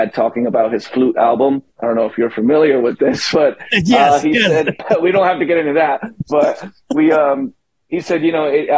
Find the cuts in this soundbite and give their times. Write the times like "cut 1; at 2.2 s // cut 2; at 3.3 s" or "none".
cut 1; at 4.8 s

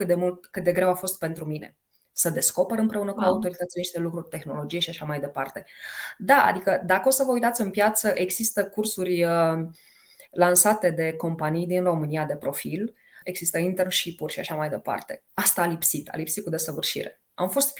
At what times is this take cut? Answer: cut 1; at 13.2 s // cut 2; at 15.3 s

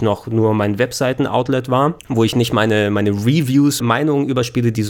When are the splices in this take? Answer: cut 1; at 2.0 s // cut 2; at 3.8 s

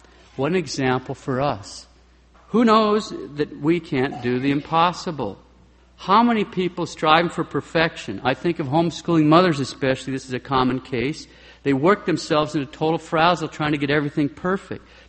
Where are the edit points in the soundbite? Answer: cut 1; at 2.3 s

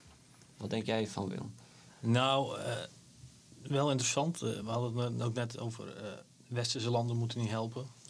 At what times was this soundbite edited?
none

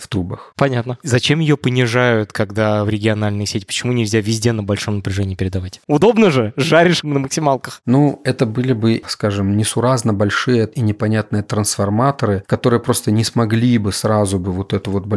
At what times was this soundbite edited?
none

